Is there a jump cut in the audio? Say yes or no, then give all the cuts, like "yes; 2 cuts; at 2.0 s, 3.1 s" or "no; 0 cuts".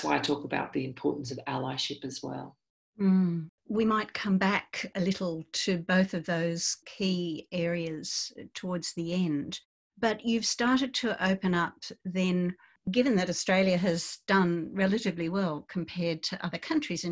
no; 0 cuts